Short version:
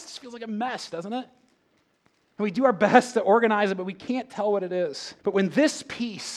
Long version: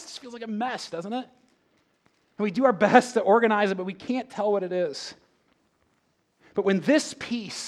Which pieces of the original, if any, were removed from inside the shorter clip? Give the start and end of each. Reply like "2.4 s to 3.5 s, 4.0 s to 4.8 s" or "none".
5.2 s to 6.5 s